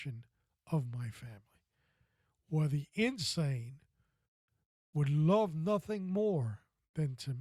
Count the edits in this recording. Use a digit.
0